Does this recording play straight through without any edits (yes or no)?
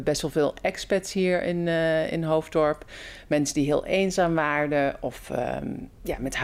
yes